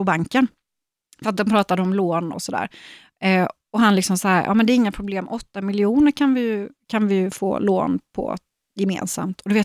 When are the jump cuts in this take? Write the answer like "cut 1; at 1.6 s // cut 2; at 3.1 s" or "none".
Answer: cut 1; at 2.3 s